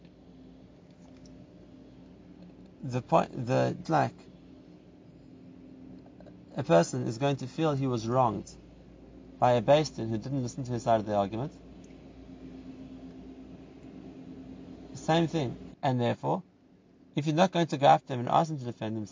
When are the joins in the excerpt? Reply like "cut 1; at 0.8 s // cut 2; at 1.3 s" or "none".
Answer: cut 1; at 3.8 s // cut 2; at 15.7 s